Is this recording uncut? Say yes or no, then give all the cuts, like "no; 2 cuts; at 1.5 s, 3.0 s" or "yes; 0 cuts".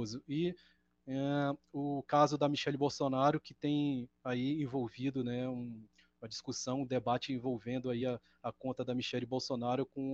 yes; 0 cuts